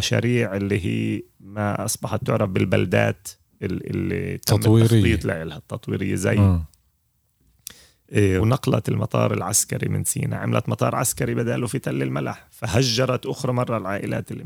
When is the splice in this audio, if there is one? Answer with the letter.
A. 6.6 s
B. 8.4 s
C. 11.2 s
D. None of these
B